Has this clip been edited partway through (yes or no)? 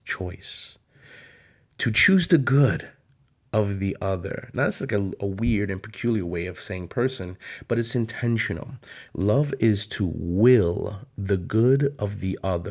yes